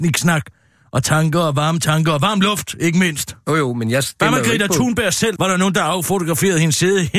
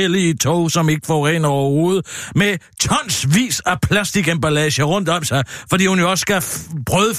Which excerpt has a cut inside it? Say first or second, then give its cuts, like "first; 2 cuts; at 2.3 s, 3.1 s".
first; 1 cut; at 5.4 s